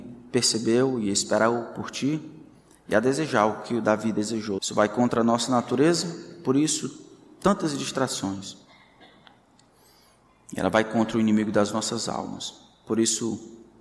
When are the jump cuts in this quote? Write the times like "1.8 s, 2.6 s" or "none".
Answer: 4.6 s